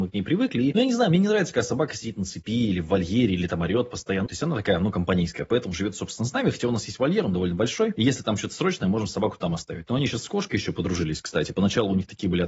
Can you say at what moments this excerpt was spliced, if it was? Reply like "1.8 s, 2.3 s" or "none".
4.3 s